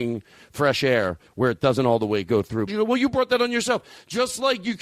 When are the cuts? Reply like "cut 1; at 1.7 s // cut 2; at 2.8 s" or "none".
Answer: cut 1; at 2.7 s